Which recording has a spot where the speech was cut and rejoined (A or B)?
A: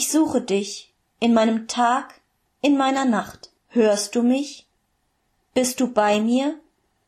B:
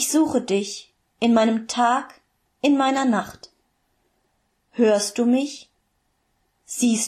A